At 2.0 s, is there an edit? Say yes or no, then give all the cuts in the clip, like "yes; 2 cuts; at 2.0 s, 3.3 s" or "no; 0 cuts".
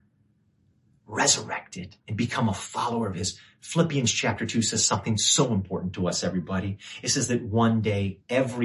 yes; 1 cut; at 2.0 s